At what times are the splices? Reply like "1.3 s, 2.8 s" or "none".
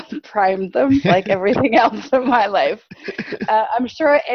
none